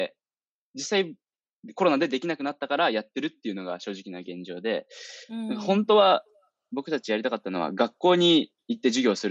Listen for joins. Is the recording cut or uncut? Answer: uncut